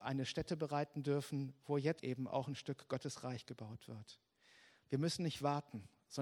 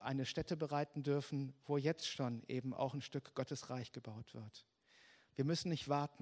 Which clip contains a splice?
first; 1 cut; at 2.0 s

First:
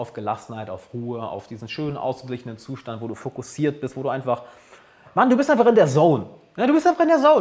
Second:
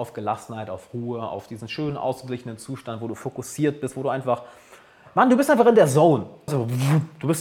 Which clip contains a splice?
second; 1 cut; at 6.5 s

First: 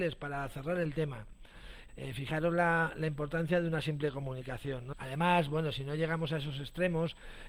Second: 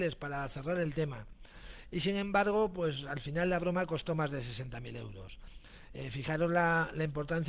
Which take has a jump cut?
first; 2 cuts; at 1.9 s, 4.9 s

